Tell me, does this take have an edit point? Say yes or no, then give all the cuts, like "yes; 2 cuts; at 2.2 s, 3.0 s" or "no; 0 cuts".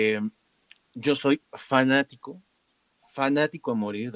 no; 0 cuts